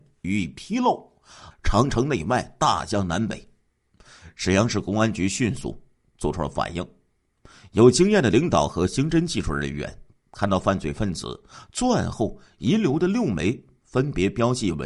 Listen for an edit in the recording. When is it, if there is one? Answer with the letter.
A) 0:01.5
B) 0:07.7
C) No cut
A